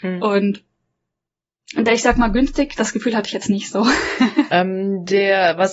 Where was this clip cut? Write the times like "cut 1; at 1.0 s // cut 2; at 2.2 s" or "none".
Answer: cut 1; at 2.8 s // cut 2; at 4.5 s